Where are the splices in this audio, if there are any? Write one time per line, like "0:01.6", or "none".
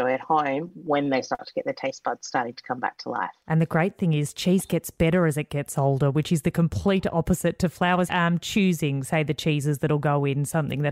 0:08.1